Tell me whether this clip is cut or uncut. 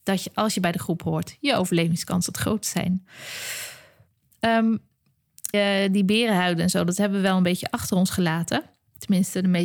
cut